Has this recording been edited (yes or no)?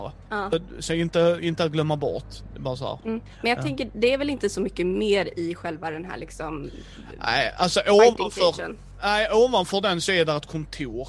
no